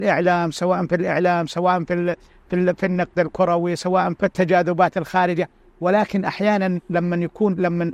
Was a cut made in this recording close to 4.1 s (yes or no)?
yes